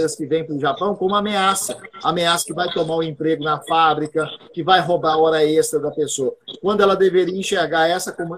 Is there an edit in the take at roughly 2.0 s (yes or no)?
no